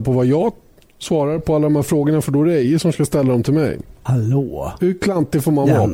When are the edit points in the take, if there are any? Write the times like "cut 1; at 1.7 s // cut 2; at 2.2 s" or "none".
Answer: cut 1; at 4.1 s